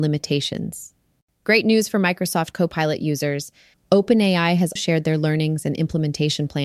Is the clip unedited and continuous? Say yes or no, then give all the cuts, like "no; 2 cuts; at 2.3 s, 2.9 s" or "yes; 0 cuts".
no; 2 cuts; at 3.7 s, 4.8 s